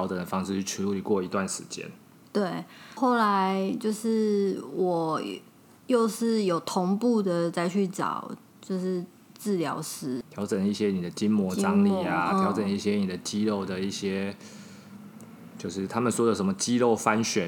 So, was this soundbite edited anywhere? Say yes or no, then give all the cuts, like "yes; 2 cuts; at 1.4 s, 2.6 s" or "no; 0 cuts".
yes; 1 cut; at 10.2 s